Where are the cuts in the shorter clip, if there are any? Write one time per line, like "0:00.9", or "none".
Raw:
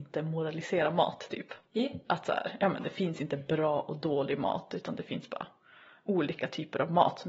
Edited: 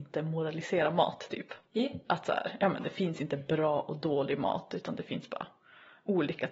none